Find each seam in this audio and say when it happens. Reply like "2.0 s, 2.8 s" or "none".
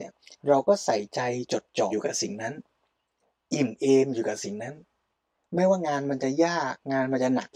1.9 s